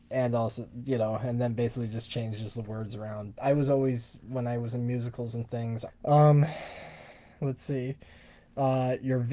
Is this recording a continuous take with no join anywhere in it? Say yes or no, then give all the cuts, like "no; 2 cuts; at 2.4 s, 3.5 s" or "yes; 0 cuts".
no; 2 cuts; at 3.3 s, 5.9 s